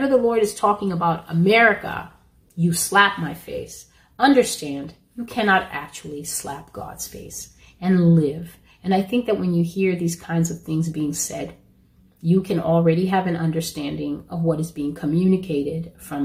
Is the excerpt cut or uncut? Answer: uncut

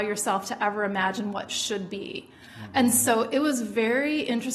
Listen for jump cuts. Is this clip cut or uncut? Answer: uncut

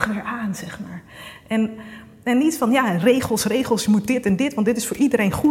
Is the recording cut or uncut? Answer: uncut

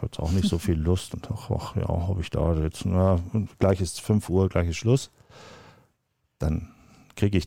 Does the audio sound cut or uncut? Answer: uncut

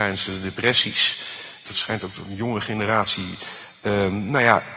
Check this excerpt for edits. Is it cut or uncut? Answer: cut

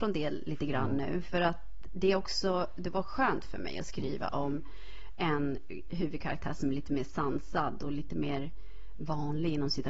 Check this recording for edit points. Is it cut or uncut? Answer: uncut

